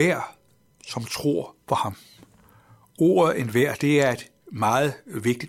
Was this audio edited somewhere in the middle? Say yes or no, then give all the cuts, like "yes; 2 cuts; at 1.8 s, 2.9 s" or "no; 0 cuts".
no; 0 cuts